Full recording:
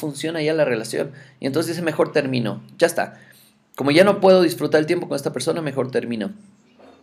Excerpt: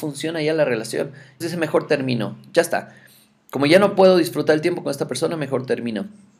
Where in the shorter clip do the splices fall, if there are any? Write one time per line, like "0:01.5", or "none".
0:01.4